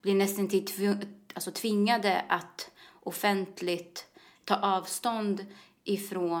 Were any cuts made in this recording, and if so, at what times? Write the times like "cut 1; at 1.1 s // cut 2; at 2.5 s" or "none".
none